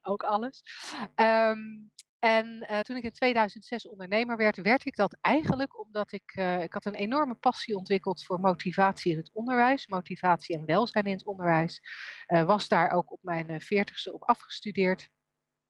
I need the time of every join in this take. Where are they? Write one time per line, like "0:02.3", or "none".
none